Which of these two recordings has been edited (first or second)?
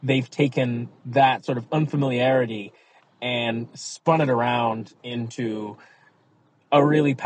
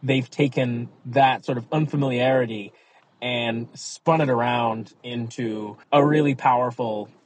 second